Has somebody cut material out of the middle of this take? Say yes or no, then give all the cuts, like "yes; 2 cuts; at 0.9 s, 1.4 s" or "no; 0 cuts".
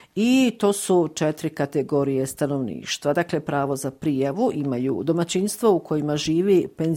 no; 0 cuts